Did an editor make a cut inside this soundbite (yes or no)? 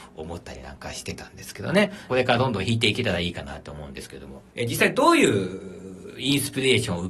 yes